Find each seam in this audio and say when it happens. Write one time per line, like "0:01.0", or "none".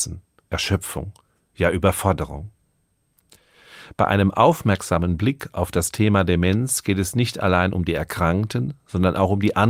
none